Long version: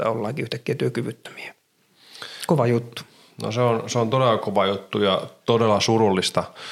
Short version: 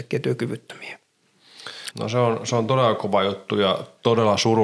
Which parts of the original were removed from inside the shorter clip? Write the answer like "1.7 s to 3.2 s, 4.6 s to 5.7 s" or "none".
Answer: 2.5 s to 3.3 s

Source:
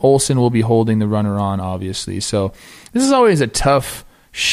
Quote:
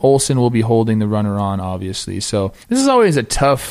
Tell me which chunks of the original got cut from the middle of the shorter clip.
2.6 s to 2.8 s

